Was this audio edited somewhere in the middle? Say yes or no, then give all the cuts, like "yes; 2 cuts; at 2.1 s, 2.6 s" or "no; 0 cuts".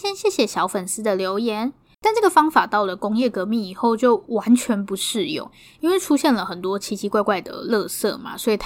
yes; 1 cut; at 1.9 s